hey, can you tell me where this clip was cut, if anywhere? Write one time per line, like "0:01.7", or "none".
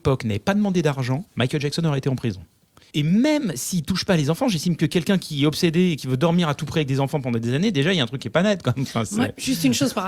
0:01.3
0:02.9